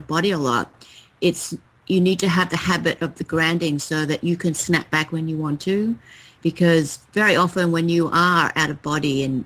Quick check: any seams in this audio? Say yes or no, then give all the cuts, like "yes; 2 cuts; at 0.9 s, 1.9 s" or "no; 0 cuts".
no; 0 cuts